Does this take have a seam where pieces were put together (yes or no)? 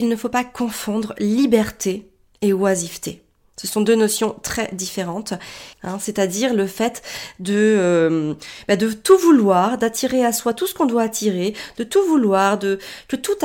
yes